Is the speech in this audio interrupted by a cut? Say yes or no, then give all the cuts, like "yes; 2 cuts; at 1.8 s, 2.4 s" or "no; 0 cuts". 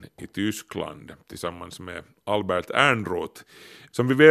no; 0 cuts